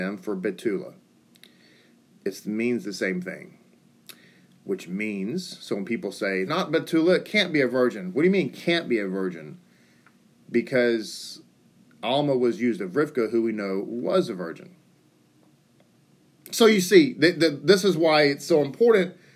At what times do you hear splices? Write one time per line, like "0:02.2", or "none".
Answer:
0:06.5

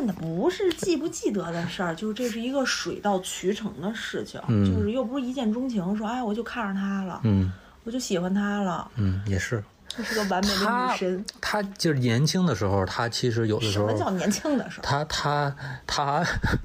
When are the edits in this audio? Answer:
0:09.7

